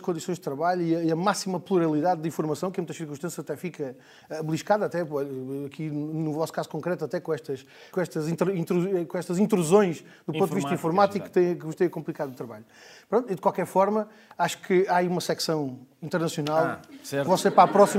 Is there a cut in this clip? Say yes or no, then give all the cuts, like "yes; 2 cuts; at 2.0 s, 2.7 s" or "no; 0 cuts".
yes; 1 cut; at 7.9 s